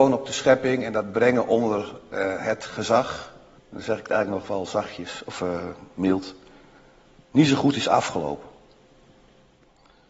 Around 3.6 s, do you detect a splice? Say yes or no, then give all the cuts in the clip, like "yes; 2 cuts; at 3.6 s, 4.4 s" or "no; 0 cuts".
yes; 1 cut; at 3.6 s